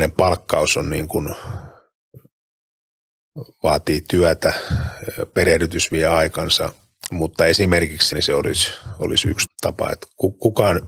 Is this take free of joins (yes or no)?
no